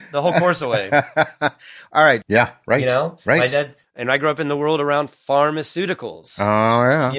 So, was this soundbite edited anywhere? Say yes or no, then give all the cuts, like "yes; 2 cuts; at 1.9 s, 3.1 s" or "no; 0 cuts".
yes; 1 cut; at 2.2 s